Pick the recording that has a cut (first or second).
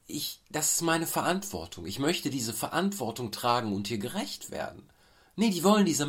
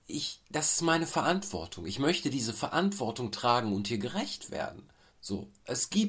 second